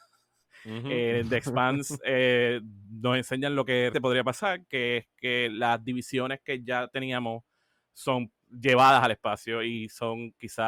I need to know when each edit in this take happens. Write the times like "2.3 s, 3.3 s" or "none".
3.9 s, 8.4 s